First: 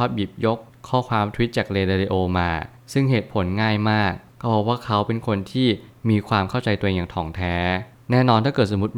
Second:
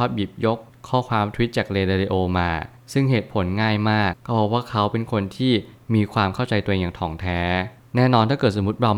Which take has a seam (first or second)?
second